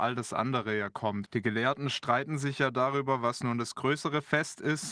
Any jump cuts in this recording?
yes; 1 cut; at 1.3 s

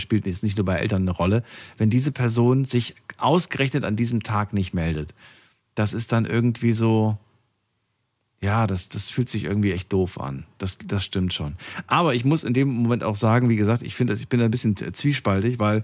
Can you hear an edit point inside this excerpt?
no; 0 cuts

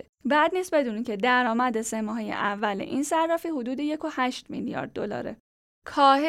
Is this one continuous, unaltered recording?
yes; 0 cuts

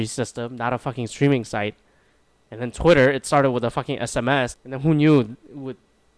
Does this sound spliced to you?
yes; 1 cut; at 4.5 s

